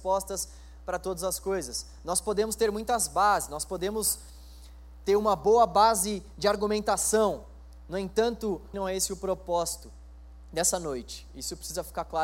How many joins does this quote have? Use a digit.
1